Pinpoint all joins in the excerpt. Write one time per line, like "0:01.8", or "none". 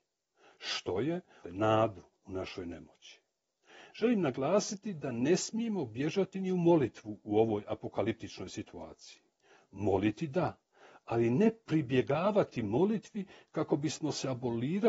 0:01.4